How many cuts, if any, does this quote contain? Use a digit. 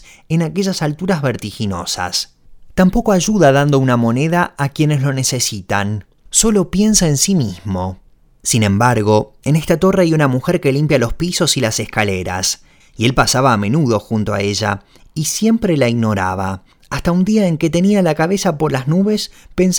0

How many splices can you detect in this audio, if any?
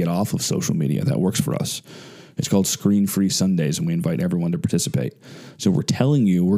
0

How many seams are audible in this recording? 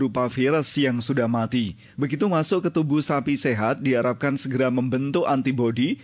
0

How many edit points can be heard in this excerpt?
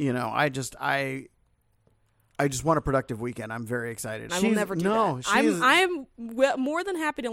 1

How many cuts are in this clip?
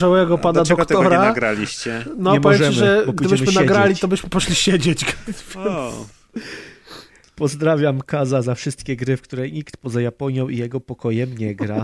0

